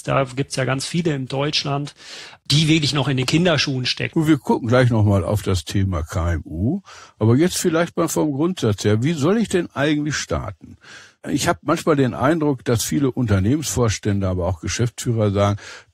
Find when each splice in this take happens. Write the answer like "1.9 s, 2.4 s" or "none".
4.1 s